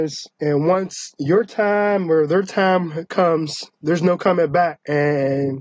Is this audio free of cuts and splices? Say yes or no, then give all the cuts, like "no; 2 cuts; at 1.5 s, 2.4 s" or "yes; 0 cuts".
yes; 0 cuts